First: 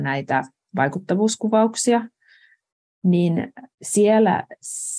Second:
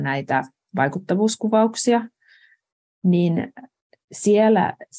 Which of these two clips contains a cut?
first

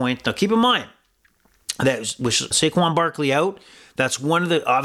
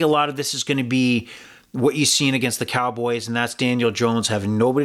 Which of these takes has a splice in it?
first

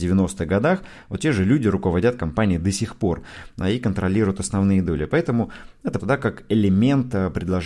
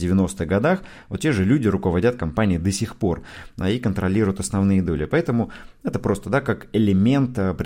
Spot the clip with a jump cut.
first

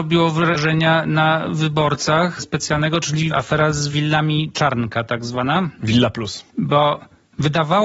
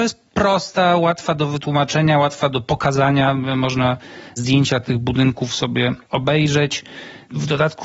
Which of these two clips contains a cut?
first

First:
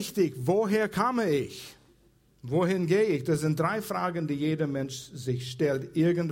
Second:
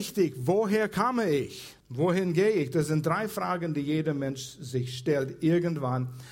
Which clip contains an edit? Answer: second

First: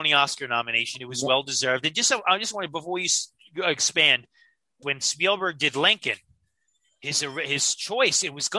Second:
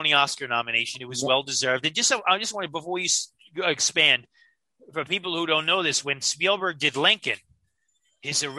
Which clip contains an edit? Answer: first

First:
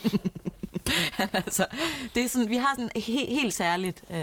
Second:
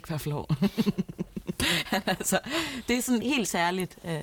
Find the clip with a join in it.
second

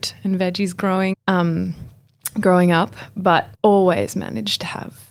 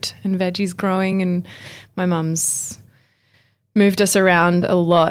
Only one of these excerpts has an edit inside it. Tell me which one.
first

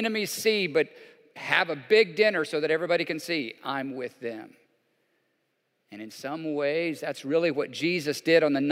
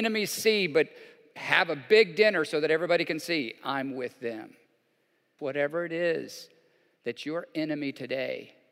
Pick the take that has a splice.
second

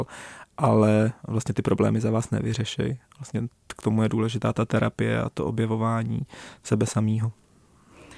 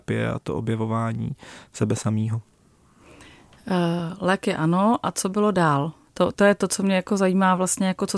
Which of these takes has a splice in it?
second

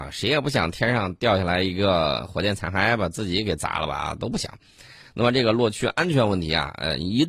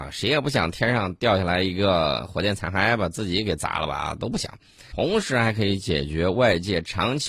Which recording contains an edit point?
second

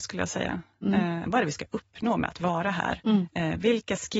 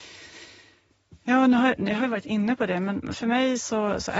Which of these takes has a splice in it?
first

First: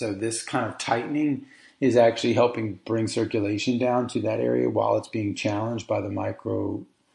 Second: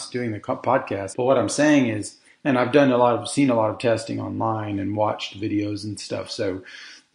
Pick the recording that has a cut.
second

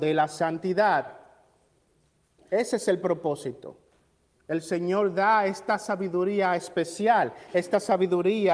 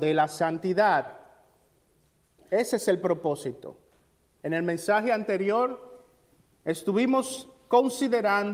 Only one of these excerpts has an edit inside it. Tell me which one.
second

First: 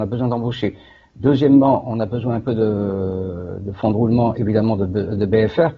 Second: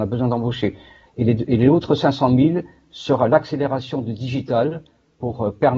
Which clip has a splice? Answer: second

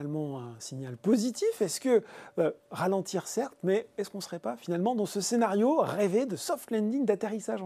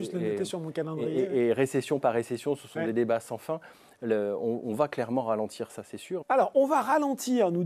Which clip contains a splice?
second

